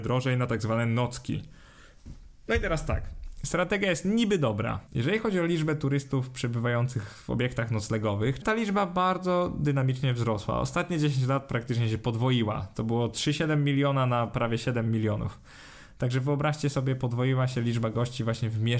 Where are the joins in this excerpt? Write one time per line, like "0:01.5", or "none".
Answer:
0:04.9
0:08.4